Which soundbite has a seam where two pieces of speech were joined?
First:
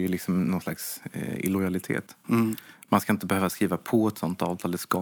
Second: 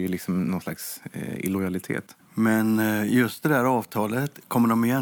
second; 1 cut; at 2.2 s

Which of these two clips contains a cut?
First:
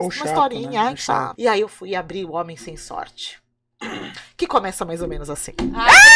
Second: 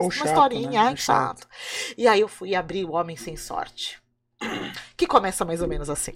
first; 1 cut; at 1.4 s

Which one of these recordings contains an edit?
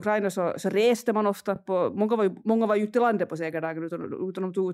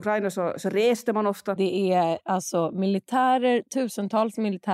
second; 1 cut; at 1.6 s

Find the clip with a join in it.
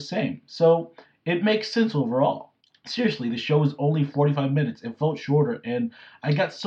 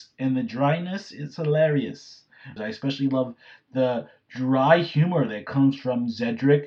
second; 1 cut; at 2.6 s

